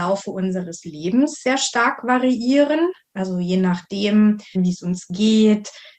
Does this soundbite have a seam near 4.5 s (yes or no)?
yes